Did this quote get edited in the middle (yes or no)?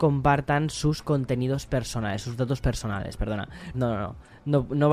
yes